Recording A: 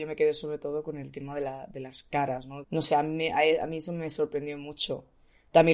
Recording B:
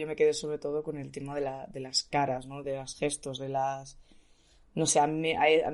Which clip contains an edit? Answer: A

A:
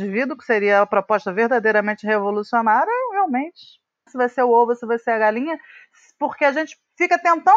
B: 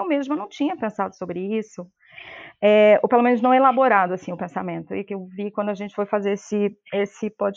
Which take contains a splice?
A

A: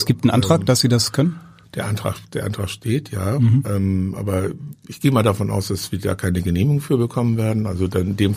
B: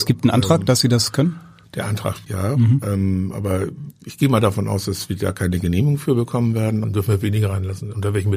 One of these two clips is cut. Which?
B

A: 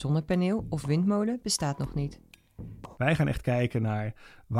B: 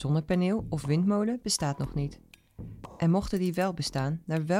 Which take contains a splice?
A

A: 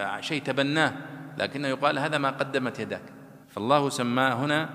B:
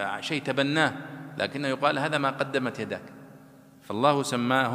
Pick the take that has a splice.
A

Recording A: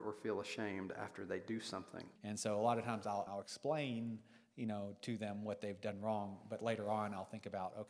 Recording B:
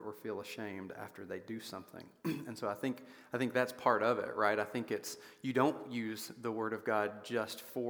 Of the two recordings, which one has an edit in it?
A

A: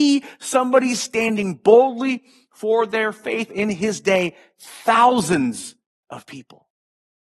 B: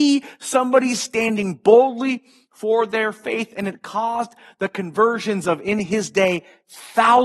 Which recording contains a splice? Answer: A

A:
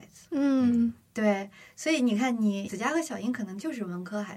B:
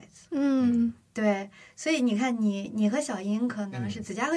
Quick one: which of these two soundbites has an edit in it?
A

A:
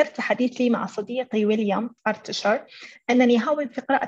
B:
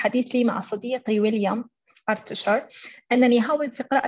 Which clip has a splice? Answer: A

